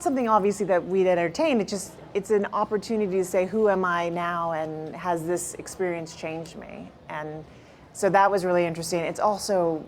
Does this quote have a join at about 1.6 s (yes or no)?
no